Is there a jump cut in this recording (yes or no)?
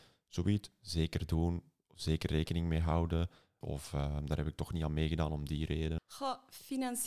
yes